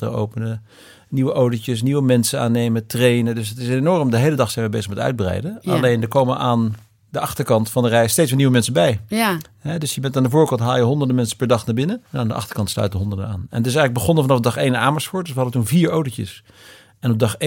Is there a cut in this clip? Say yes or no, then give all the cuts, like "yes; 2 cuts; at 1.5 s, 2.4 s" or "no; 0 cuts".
yes; 1 cut; at 12.1 s